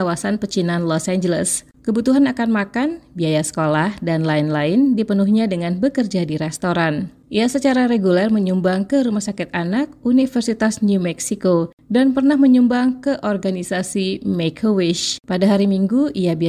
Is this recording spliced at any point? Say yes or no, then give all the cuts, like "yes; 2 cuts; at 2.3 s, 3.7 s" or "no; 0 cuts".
yes; 1 cut; at 7.2 s